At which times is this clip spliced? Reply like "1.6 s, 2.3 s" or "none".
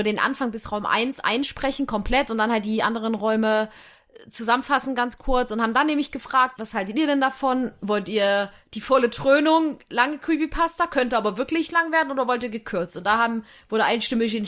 6.6 s